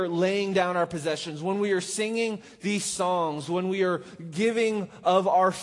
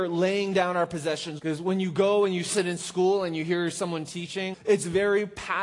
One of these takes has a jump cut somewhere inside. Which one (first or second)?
second